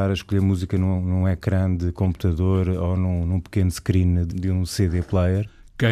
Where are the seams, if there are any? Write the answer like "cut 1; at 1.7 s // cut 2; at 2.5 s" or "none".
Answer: cut 1; at 4.3 s